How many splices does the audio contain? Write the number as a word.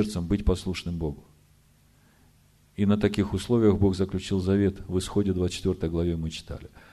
zero